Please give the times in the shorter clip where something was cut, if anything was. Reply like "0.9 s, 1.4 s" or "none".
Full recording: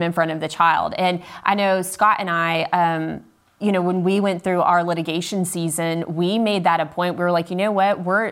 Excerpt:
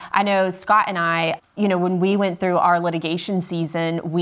1.4 s

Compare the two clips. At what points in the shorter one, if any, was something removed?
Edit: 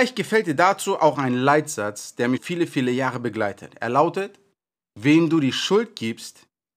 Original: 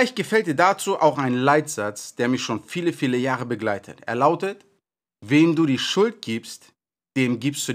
2.4 s

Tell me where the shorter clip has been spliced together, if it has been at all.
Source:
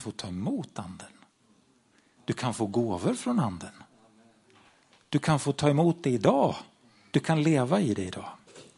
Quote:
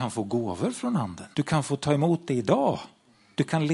1.3 s

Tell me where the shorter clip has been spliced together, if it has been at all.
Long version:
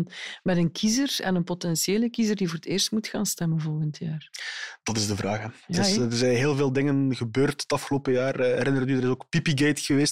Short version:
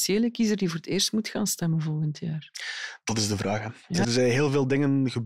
4.0 s

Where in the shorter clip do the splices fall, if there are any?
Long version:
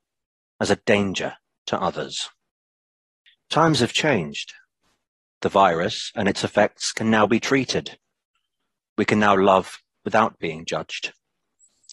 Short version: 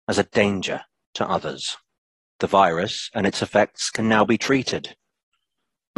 2.2 s

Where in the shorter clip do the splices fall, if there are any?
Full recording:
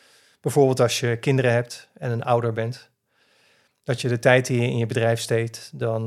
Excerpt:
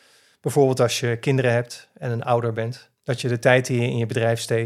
3.0 s

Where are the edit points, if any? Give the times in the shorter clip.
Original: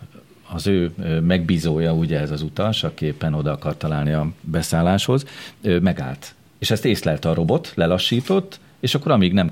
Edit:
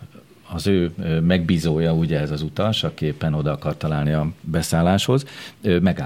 none

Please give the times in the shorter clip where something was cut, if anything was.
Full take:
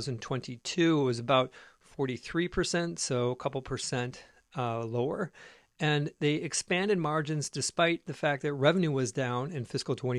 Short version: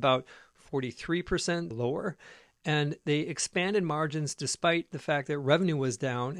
1.7 s

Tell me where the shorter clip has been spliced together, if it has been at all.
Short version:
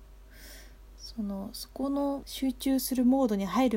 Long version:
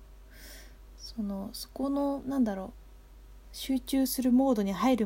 2.2 s

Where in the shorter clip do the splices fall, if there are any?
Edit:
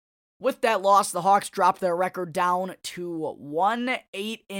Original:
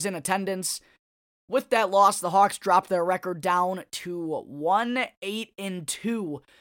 none

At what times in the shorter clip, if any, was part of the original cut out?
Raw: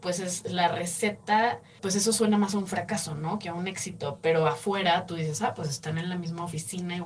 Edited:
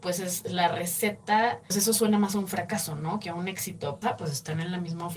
1.7 s, 4.0 s

